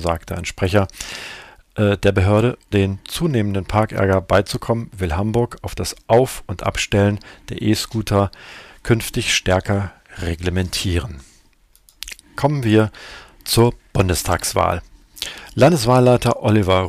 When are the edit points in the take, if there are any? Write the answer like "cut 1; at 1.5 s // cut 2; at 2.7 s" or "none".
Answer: cut 1; at 2.7 s